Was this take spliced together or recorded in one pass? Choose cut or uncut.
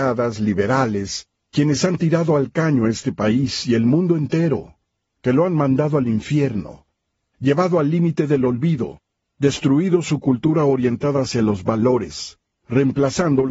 uncut